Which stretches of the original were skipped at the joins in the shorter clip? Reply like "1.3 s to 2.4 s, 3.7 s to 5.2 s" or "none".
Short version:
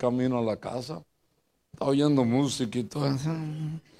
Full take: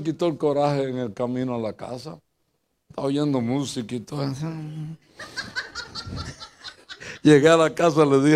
none